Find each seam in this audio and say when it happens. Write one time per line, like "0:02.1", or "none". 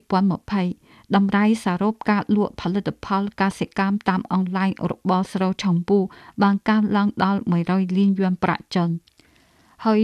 none